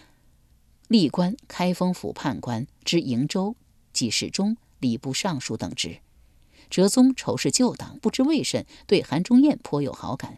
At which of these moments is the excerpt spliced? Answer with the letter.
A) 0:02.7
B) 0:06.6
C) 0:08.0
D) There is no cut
C